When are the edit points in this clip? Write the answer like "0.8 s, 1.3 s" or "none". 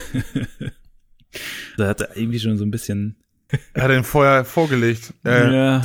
1.8 s, 3.5 s